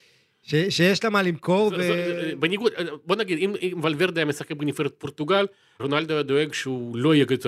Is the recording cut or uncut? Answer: cut